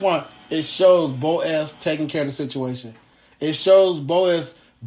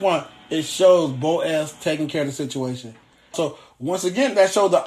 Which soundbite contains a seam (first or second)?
second